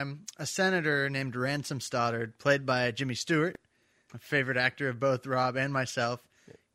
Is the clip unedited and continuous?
no; 1 cut; at 4.1 s

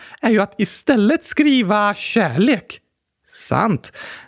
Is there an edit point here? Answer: no; 0 cuts

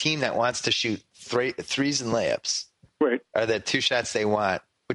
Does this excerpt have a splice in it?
no; 0 cuts

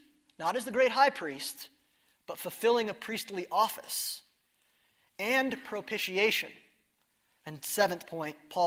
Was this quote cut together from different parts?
yes; 1 cut; at 7.4 s

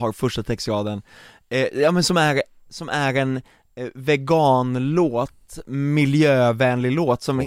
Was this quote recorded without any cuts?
yes; 0 cuts

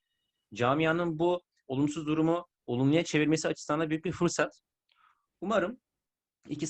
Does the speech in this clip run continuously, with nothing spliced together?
yes; 0 cuts

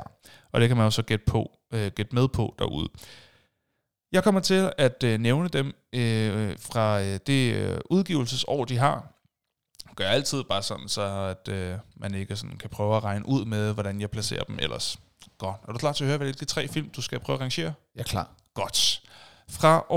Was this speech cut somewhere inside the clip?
no; 0 cuts

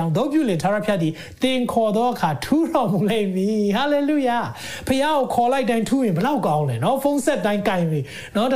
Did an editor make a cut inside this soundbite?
no; 0 cuts

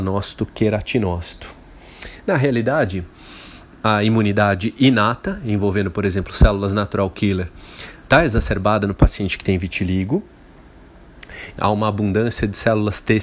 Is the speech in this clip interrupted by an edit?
yes; 1 cut; at 11.6 s

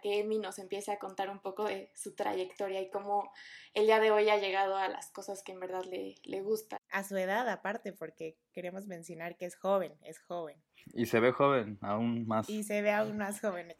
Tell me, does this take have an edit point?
no; 0 cuts

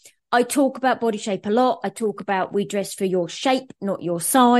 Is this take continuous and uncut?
yes; 0 cuts

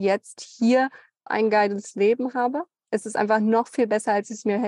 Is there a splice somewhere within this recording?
yes; 1 cut; at 1.3 s

